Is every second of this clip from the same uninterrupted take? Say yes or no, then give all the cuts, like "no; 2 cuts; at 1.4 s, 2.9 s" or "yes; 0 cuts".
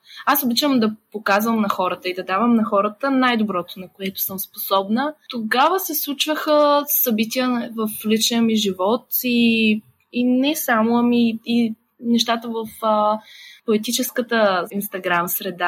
yes; 0 cuts